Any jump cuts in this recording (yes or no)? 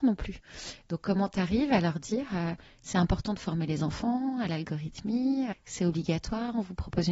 yes